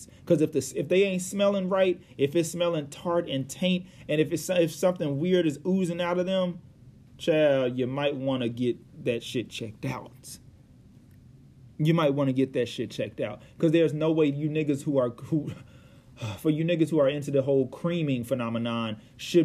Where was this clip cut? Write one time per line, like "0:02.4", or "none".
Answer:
none

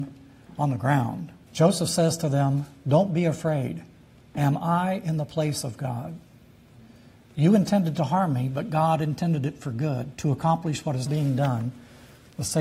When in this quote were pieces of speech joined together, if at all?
0:01.5
0:11.1

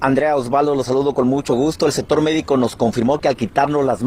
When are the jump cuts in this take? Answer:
none

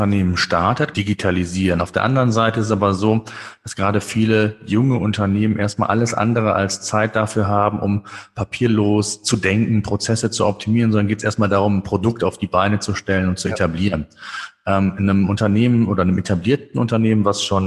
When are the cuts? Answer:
0:00.9

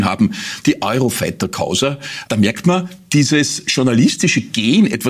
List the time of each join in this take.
0:02.3

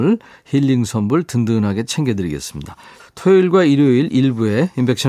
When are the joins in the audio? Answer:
0:03.0

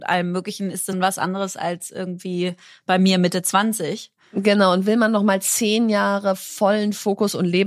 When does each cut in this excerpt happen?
0:00.9

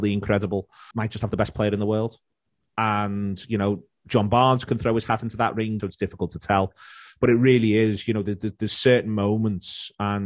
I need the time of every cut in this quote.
0:00.9
0:05.8

